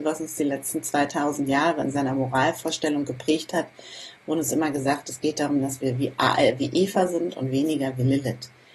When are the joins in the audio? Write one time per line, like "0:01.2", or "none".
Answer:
none